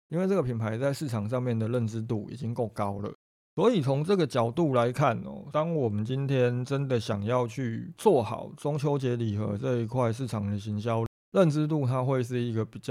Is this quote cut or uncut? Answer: cut